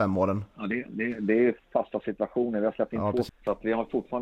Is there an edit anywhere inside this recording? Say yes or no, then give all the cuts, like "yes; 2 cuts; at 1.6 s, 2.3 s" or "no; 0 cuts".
yes; 2 cuts; at 1.2 s, 3.3 s